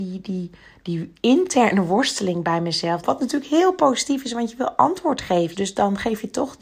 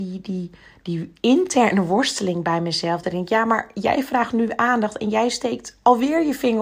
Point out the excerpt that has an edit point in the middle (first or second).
first